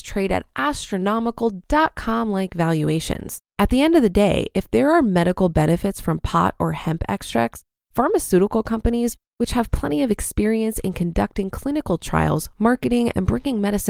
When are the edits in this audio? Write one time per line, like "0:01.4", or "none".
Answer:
0:03.5